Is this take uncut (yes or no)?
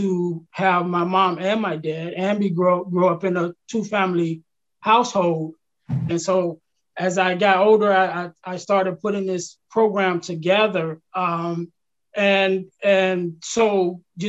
no